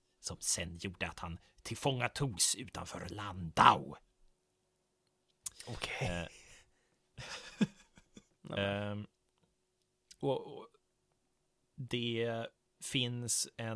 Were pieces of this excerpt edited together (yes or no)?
yes